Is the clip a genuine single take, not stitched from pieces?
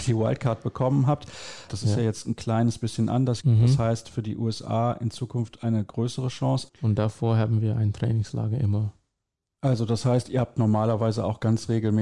no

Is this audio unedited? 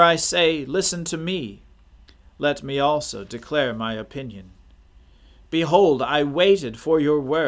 yes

